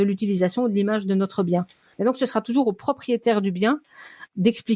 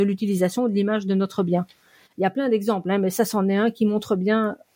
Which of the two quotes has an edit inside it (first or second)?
first